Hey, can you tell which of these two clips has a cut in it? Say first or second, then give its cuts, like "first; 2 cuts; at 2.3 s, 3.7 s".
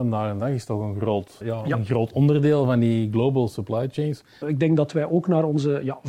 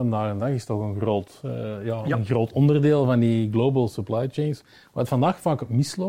first; 2 cuts; at 1.4 s, 4.4 s